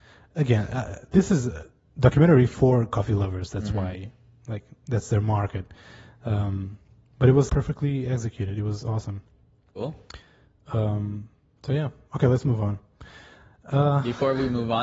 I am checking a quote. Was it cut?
yes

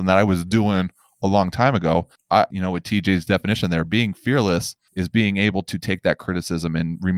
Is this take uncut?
no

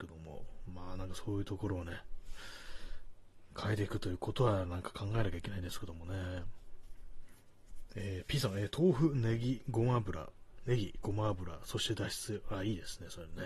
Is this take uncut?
yes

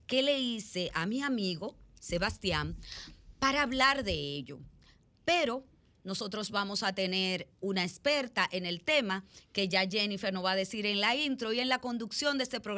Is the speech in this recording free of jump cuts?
no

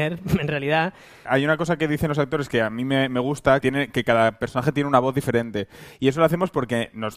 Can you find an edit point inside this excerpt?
yes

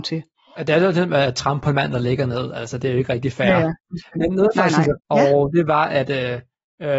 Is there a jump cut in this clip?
yes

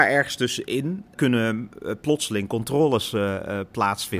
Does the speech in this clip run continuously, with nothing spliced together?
yes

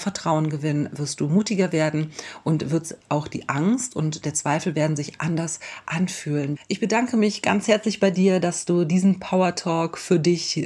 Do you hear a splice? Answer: yes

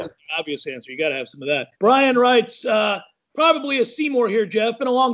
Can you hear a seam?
yes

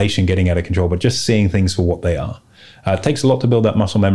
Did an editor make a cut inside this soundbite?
no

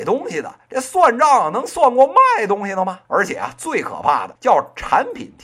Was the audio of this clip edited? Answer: yes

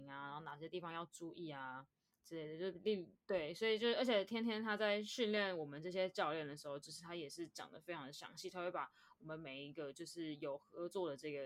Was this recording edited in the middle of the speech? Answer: no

